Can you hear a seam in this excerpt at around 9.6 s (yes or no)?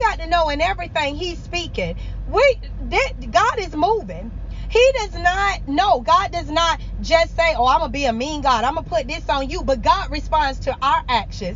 no